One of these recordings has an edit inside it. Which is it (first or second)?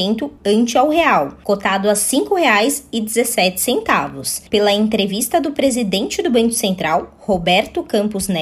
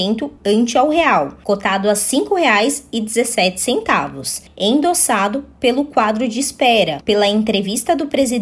first